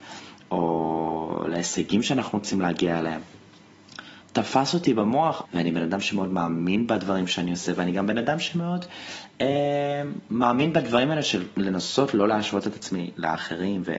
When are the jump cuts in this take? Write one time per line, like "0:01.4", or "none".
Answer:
0:04.2
0:05.5